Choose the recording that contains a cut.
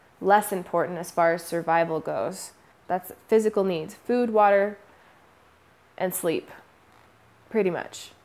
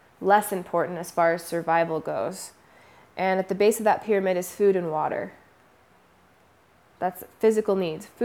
first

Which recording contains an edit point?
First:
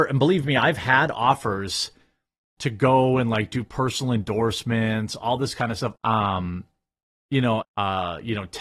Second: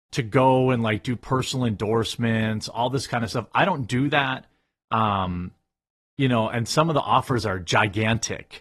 first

